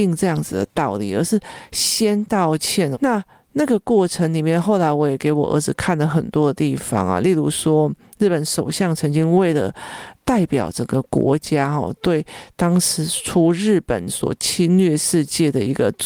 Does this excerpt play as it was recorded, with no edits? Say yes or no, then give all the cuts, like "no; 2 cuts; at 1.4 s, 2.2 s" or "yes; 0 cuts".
no; 2 cuts; at 2.9 s, 10.1 s